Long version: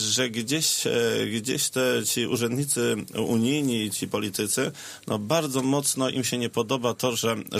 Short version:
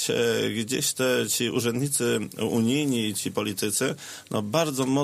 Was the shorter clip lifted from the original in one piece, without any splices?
yes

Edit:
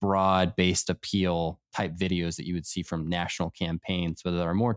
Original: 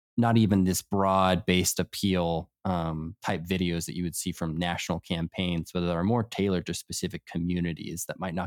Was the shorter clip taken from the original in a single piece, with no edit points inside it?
no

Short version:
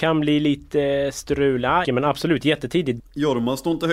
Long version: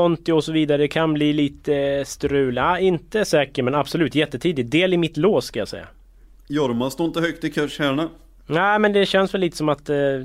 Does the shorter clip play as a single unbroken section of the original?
no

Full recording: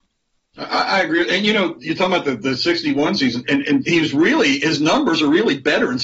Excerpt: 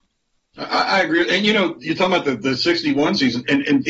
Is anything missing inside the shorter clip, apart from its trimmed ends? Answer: no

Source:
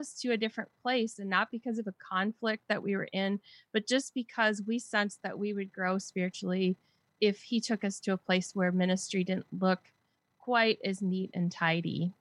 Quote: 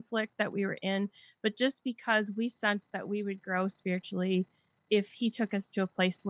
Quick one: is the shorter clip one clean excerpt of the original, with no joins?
yes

